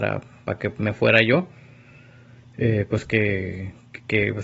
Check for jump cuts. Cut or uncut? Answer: uncut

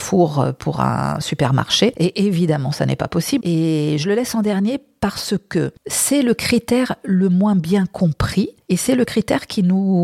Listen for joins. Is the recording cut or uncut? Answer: cut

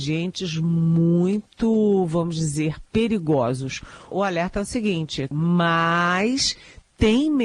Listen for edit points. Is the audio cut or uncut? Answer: cut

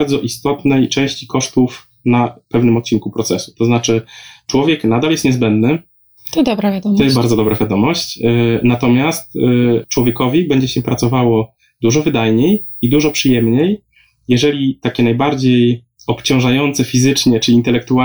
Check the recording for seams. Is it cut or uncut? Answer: uncut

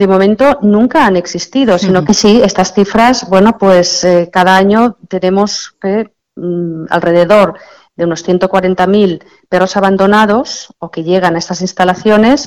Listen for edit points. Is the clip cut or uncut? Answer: cut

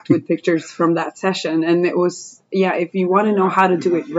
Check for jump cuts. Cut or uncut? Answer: uncut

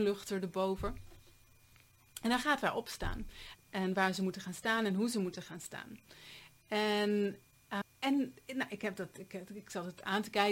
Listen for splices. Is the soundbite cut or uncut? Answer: cut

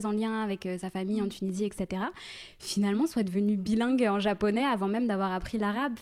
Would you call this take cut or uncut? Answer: uncut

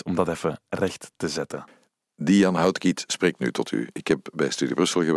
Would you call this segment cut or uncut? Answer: uncut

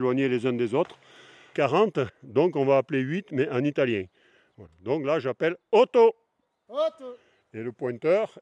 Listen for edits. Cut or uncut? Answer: cut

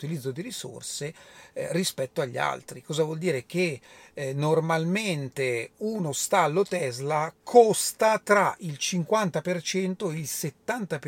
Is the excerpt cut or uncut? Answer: uncut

